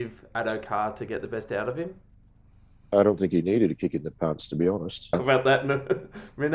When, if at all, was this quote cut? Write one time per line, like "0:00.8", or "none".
0:02.9
0:05.1